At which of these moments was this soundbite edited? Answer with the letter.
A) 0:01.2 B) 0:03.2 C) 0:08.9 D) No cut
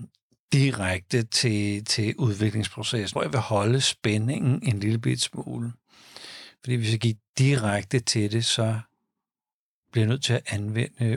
B